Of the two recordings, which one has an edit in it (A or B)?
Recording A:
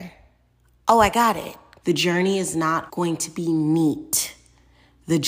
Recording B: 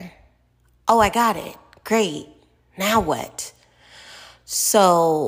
A